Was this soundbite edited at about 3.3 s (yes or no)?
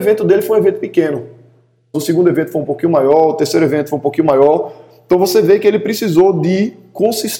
no